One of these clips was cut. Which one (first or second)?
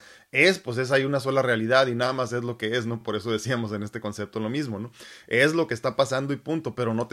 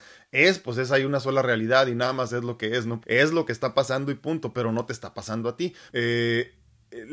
second